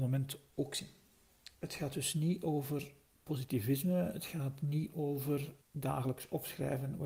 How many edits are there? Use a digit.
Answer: 2